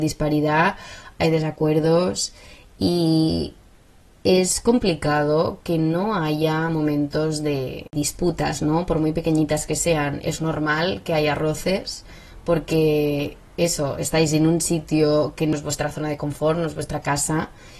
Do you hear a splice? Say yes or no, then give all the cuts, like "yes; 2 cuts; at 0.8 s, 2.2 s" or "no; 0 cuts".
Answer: no; 0 cuts